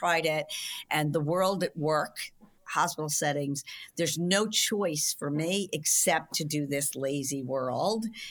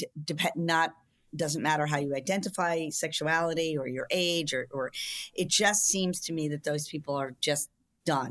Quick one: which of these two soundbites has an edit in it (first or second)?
first